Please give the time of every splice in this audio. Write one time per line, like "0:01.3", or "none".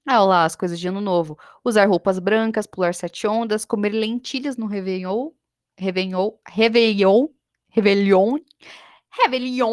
none